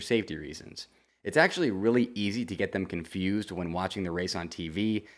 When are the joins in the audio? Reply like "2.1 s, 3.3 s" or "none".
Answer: 1.1 s